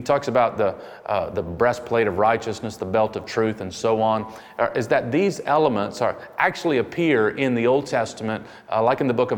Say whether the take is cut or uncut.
uncut